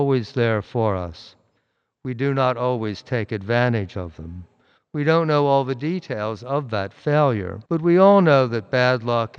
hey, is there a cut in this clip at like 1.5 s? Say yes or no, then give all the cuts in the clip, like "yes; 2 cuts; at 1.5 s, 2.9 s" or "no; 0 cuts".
no; 2 cuts; at 4.8 s, 7.6 s